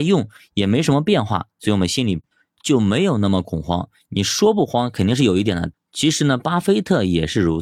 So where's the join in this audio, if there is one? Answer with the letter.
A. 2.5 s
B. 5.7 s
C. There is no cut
B